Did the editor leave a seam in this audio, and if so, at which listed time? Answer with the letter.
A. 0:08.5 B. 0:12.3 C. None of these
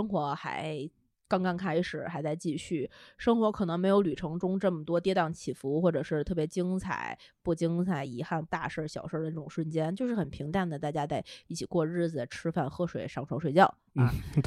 A